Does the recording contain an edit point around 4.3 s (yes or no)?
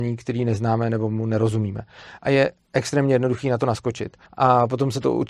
yes